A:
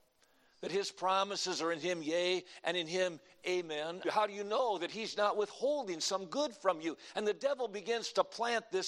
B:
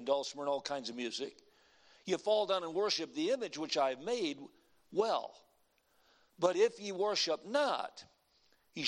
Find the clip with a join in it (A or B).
A